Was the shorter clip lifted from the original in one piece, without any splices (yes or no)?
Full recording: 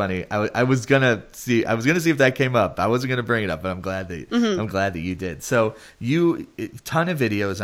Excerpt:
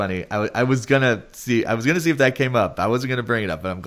yes